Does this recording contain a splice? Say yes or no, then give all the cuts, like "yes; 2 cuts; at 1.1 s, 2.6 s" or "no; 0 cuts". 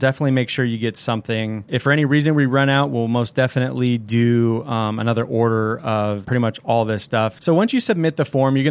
yes; 1 cut; at 6.2 s